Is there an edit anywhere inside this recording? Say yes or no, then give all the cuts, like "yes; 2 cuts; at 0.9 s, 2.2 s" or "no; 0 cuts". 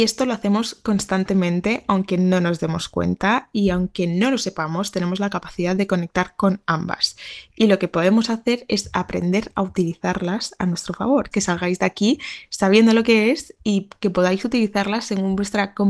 yes; 1 cut; at 11.3 s